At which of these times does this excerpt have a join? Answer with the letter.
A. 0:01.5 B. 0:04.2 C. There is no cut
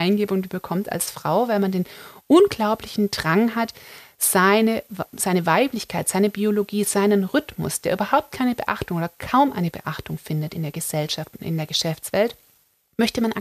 C